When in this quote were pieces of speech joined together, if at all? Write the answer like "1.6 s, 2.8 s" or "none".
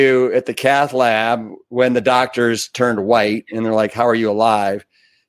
none